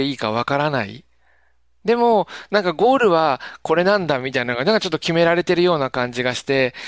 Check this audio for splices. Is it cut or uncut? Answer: uncut